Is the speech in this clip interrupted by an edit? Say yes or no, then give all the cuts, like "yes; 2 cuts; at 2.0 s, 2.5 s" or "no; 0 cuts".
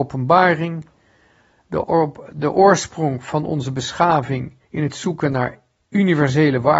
yes; 2 cuts; at 1.8 s, 4.6 s